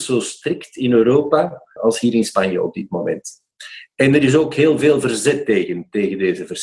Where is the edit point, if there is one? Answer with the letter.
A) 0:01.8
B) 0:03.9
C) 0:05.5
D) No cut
A